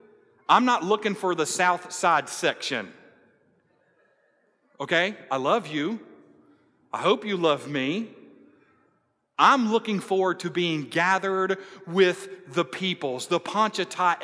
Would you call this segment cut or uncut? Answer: uncut